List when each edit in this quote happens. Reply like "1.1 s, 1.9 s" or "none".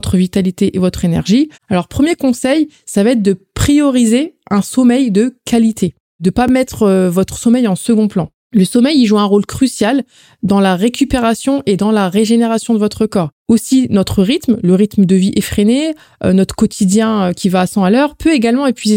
1.5 s, 13.3 s